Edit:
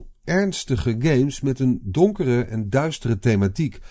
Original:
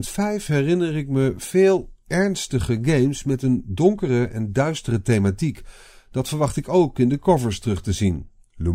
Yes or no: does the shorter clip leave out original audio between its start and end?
no